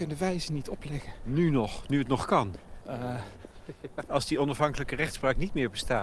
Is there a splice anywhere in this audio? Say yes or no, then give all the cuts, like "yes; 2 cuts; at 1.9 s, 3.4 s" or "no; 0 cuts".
yes; 2 cuts; at 2.8 s, 4.1 s